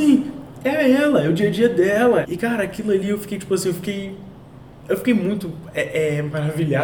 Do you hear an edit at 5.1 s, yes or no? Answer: no